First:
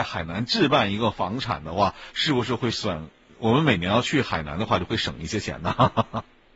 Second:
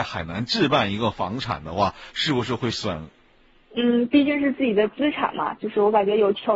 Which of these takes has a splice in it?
second; 1 cut; at 3.2 s

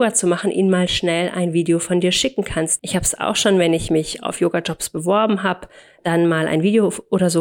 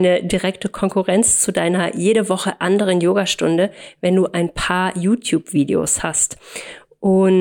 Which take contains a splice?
first; 1 cut; at 2.8 s

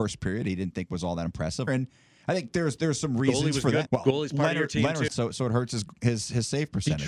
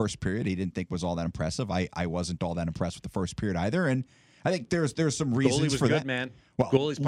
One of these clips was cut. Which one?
first; 3 cuts; at 1.7 s, 3.9 s, 5.1 s

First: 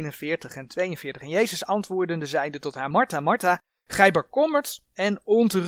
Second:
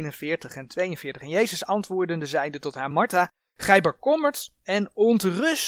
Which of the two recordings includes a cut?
second; 1 cut; at 2.9 s

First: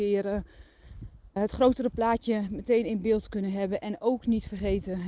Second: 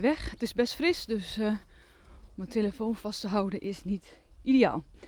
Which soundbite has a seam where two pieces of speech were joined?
first; 1 cut; at 1.4 s

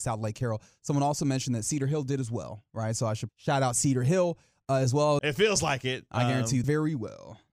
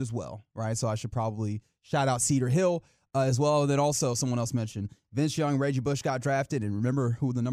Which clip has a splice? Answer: first; 3 cuts; at 3.3 s, 5.2 s, 6.6 s

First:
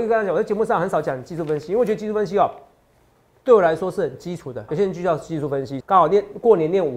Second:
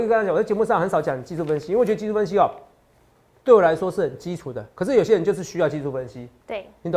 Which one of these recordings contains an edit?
first; 2 cuts; at 4.7 s, 5.8 s

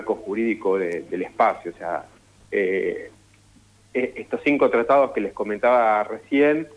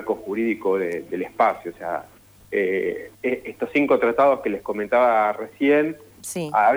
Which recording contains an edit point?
second; 1 cut; at 3.2 s

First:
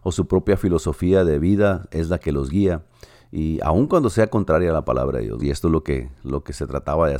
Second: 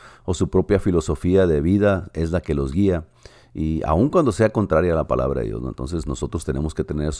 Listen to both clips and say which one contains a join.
first; 1 cut; at 5.4 s

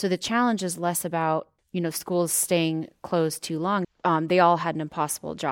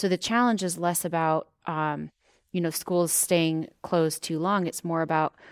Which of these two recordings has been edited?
first; 2 cuts; at 1.6 s, 3.8 s

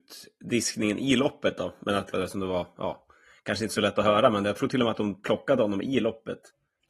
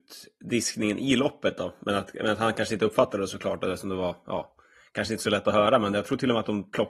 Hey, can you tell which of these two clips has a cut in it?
first; 1 cut; at 2.1 s

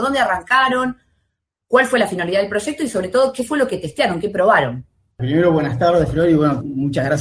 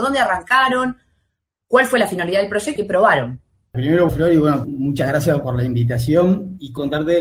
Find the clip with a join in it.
second; 2 cuts; at 2.8 s, 4.1 s

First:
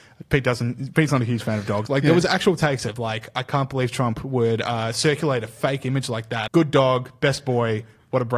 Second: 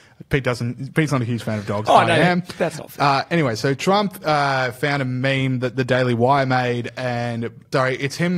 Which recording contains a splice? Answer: first; 2 cuts; at 1.9 s, 6.5 s

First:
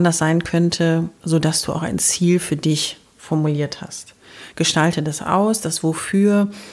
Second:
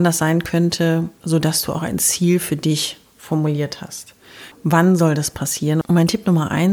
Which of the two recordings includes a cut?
second; 2 cuts; at 4.5 s, 5.8 s

